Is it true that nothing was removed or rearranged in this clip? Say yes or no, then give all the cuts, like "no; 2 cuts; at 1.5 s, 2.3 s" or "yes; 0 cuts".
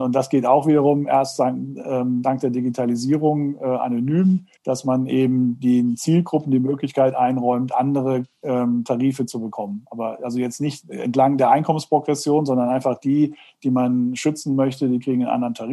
no; 1 cut; at 4.6 s